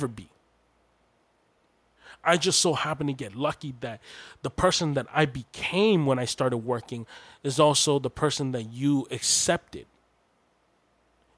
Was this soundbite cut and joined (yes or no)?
no